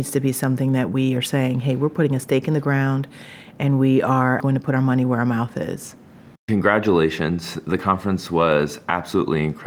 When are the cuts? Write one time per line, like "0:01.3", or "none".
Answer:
0:04.4